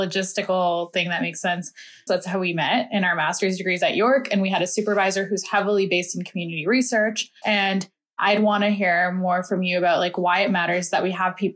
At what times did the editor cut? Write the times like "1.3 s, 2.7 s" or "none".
2.1 s, 7.4 s